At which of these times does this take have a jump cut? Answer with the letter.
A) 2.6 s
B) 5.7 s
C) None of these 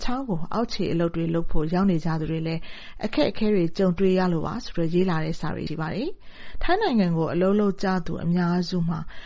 B